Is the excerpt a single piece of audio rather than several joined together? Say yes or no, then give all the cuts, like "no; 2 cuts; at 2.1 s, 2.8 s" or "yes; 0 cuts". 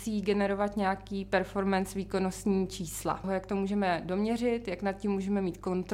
no; 1 cut; at 3.2 s